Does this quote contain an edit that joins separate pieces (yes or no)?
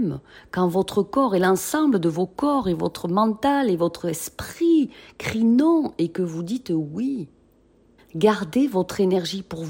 yes